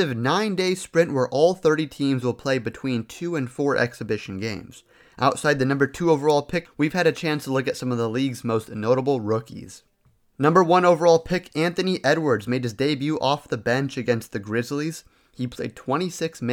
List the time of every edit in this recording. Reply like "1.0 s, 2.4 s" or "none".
6.6 s